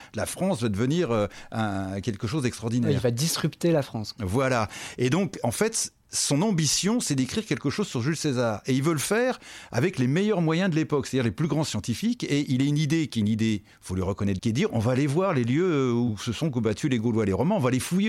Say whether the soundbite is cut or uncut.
cut